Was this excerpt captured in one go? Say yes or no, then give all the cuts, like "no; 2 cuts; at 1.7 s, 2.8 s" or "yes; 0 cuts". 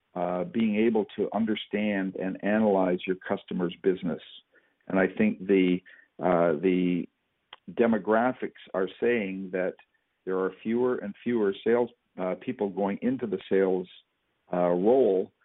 yes; 0 cuts